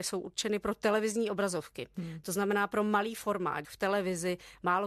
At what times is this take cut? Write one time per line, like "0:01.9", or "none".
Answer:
0:03.6